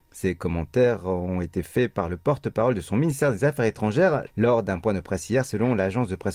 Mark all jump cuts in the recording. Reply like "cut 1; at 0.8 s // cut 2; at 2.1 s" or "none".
cut 1; at 4.3 s